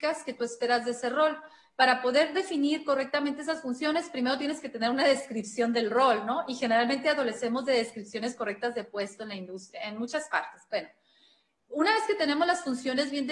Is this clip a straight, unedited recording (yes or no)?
yes